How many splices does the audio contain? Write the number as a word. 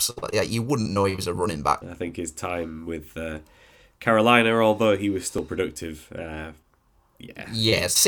one